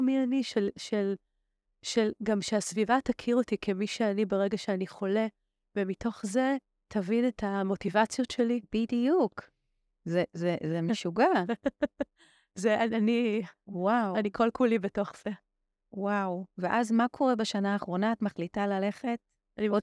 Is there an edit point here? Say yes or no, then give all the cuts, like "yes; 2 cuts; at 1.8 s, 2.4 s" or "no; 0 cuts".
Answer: no; 0 cuts